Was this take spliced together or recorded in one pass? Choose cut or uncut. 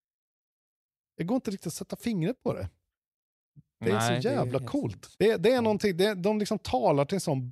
cut